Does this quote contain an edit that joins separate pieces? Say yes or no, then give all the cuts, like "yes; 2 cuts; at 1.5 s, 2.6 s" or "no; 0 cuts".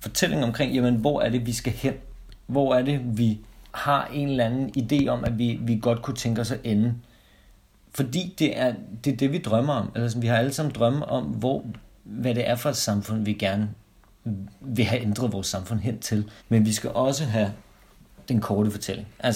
yes; 2 cuts; at 3.7 s, 16.4 s